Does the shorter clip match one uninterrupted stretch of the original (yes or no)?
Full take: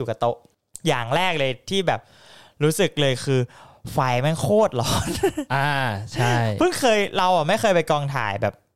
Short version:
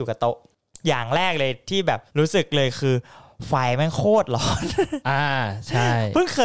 no